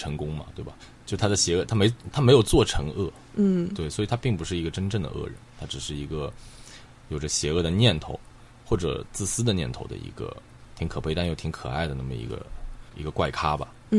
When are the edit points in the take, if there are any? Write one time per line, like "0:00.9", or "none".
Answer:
none